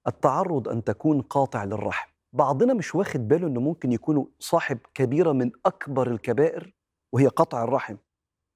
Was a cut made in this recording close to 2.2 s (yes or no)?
yes